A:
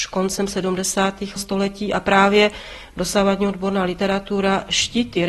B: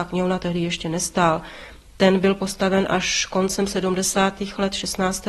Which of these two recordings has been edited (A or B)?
A